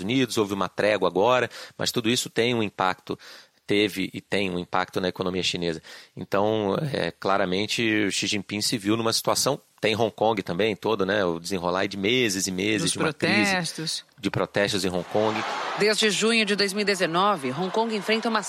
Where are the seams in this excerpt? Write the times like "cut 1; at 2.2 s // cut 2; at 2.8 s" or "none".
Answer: none